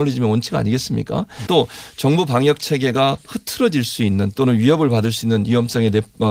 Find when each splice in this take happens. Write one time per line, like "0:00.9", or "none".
0:01.5